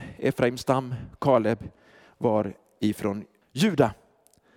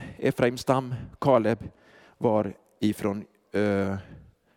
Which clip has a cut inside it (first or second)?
first